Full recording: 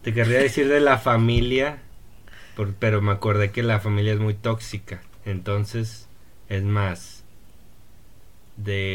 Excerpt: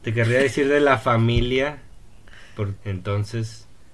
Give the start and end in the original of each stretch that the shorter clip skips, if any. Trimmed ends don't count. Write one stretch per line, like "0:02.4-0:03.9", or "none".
0:02.8-0:05.2